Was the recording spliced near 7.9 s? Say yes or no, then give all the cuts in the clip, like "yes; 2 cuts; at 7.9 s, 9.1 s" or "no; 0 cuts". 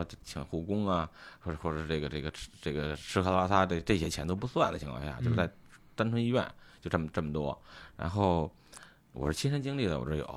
no; 0 cuts